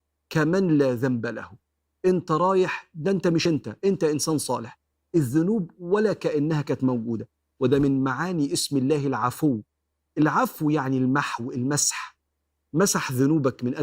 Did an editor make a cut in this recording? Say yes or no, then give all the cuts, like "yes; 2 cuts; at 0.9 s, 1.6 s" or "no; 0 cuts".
no; 0 cuts